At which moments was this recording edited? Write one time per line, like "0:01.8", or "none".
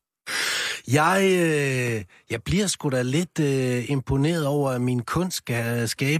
none